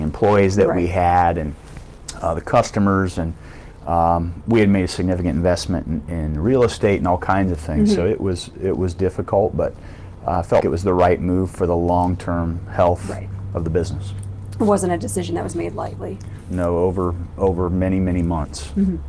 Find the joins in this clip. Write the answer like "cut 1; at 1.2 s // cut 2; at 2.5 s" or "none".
cut 1; at 10.6 s